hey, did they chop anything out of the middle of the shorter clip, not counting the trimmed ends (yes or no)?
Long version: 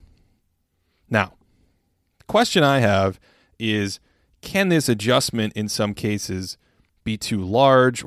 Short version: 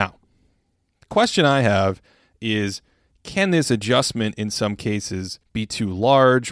yes